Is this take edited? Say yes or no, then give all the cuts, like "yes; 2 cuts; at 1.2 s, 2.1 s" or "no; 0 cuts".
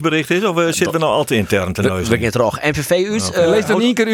no; 0 cuts